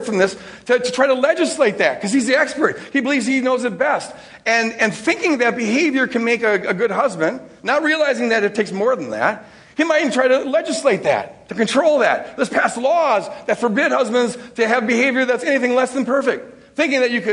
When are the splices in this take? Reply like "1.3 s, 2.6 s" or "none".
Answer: none